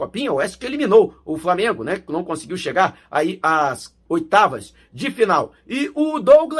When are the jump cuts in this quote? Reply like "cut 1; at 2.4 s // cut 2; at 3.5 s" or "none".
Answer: none